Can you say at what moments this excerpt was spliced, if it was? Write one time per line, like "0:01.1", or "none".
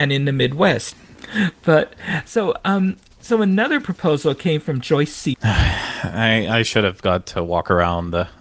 0:00.9
0:05.3